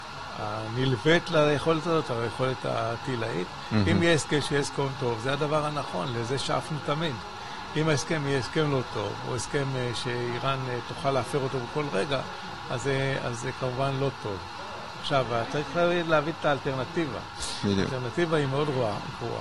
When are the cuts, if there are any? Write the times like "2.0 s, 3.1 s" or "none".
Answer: none